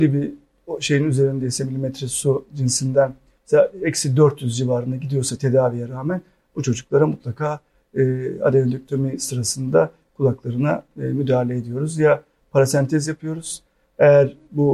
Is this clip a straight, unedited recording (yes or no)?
yes